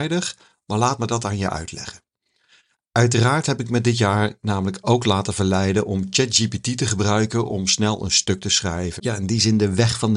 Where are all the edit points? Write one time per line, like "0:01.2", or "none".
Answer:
0:09.0

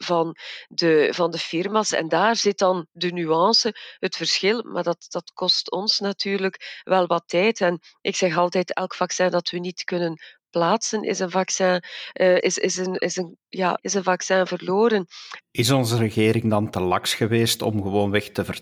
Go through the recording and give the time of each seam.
0:12.4
0:13.8
0:15.4

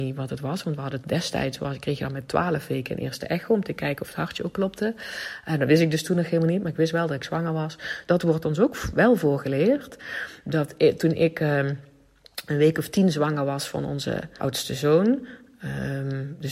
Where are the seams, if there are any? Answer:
0:08.1
0:10.4
0:14.4

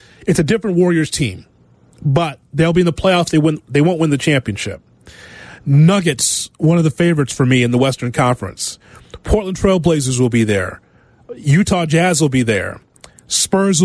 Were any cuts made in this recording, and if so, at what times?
none

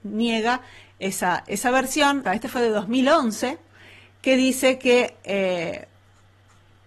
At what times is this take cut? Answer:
0:02.3

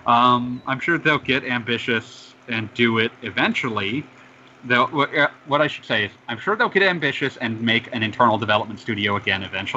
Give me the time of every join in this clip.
none

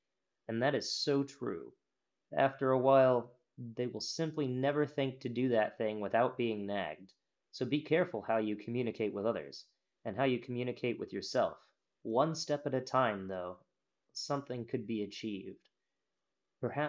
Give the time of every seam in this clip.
0:07.4
0:12.0

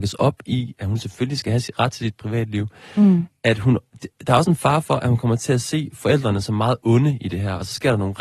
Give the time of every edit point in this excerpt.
none

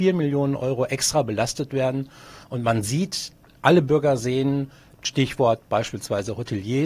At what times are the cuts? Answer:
0:02.4
0:04.9

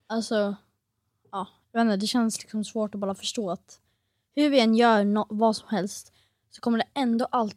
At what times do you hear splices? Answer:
none

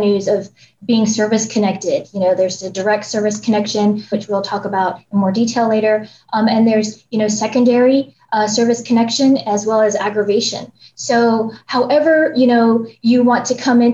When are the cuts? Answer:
0:04.1

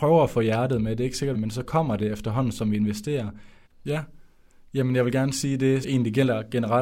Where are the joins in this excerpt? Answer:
0:01.3
0:03.7
0:05.8

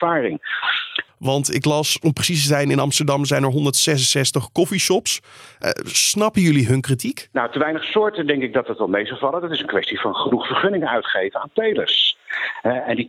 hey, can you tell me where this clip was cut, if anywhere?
0:01.1

